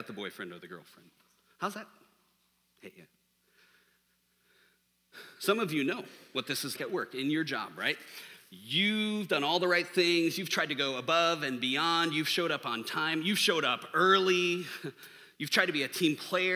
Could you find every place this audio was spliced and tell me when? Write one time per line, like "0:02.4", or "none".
0:06.8